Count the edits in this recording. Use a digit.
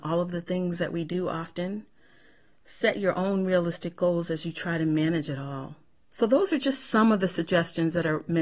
1